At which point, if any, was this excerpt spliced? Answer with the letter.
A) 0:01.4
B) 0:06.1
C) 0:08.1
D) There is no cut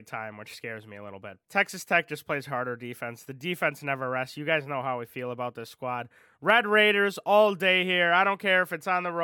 A